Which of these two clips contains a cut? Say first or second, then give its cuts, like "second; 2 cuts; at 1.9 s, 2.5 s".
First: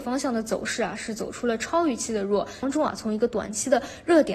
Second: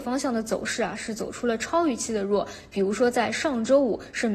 first; 1 cut; at 2.6 s